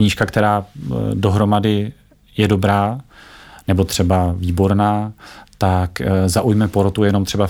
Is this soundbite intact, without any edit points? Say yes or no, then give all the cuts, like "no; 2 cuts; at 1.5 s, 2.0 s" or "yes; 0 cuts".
yes; 0 cuts